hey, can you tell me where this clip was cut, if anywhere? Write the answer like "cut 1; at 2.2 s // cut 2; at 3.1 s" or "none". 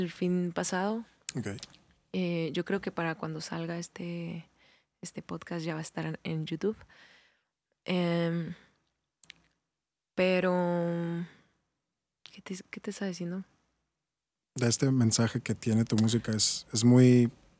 none